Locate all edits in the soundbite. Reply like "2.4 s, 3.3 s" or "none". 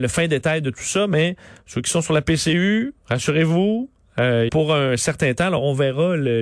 4.5 s